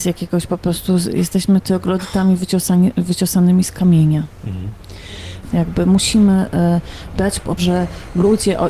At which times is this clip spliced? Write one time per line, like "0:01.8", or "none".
0:05.5
0:07.6